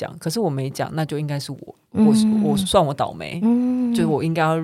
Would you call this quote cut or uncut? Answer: uncut